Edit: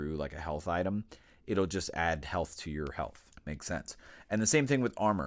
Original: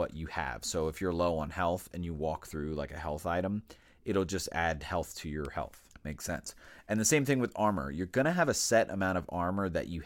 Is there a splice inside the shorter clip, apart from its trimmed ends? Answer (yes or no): no